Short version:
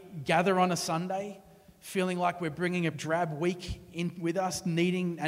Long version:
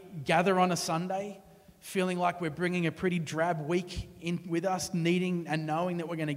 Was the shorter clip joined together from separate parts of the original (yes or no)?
yes